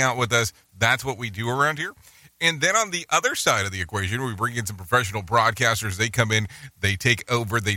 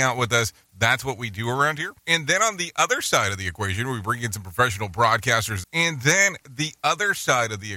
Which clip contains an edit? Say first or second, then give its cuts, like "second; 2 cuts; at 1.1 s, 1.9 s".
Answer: second; 2 cuts; at 2.0 s, 5.6 s